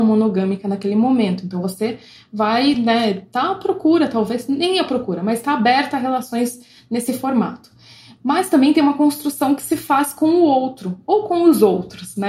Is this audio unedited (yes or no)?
yes